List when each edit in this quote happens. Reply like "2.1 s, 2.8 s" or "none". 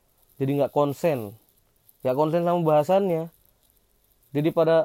none